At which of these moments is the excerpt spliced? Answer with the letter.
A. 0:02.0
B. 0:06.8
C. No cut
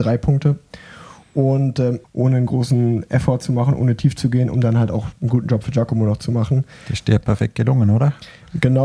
A